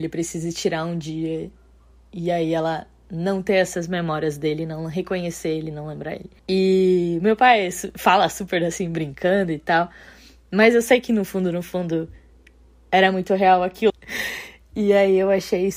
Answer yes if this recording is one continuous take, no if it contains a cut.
no